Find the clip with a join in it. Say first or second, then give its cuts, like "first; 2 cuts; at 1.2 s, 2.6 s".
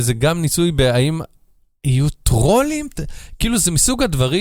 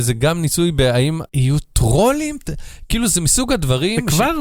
second; 1 cut; at 1.3 s